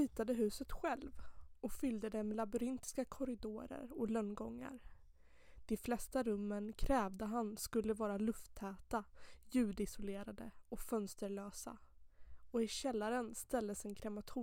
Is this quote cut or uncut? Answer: uncut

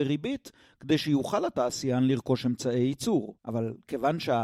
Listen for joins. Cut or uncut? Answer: cut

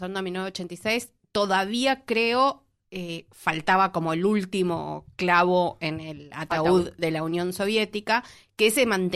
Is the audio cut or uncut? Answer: uncut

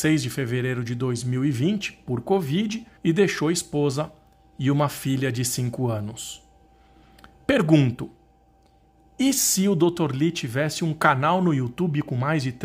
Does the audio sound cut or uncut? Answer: cut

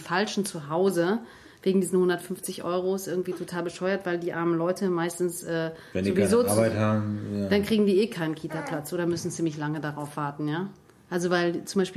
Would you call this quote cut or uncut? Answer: uncut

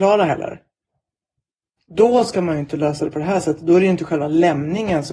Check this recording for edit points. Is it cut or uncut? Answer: cut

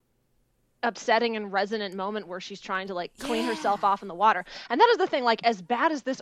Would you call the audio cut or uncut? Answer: uncut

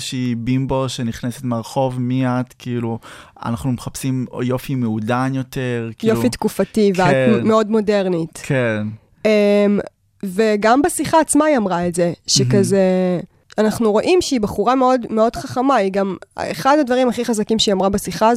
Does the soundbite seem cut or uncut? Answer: uncut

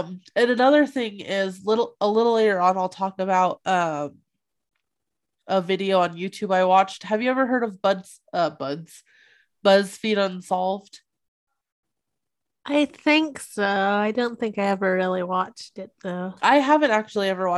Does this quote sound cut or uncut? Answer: uncut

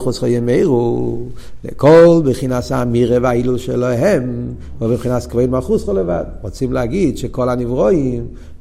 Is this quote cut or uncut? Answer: uncut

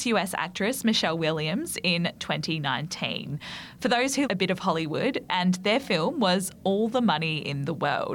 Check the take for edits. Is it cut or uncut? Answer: cut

